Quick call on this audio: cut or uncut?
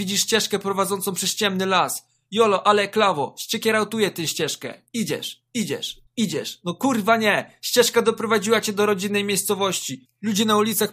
cut